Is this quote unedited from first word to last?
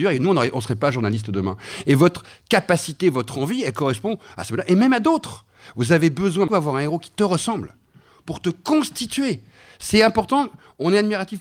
no; 1 cut; at 6.5 s

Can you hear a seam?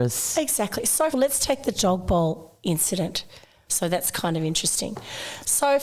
yes; 2 cuts; at 1.1 s, 3.7 s

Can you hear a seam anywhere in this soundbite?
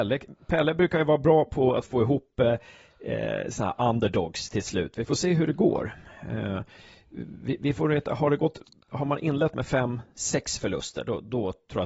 no; 0 cuts

